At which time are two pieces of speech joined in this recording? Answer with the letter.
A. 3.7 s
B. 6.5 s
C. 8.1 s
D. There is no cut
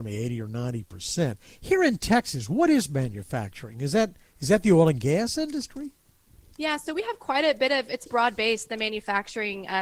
C